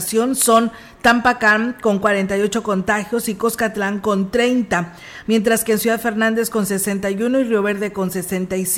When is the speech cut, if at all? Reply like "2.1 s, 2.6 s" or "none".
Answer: none